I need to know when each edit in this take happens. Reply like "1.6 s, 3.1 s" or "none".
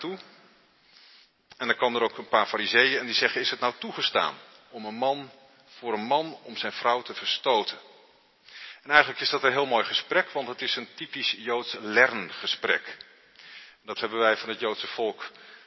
none

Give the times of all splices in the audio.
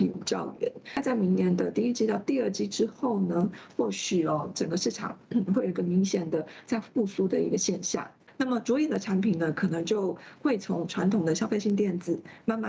none

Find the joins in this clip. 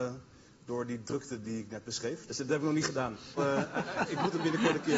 2.3 s, 3.4 s

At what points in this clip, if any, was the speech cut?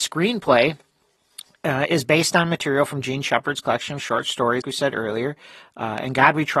4.6 s

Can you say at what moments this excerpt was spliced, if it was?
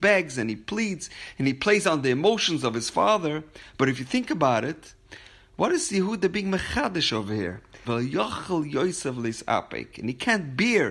7.8 s

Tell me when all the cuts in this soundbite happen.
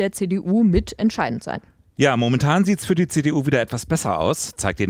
none

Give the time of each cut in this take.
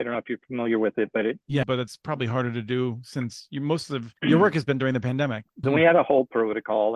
1.6 s, 5.6 s

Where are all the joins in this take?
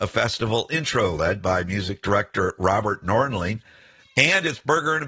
4.0 s

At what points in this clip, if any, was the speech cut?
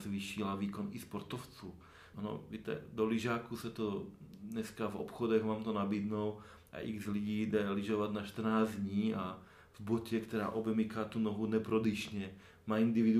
2.1 s

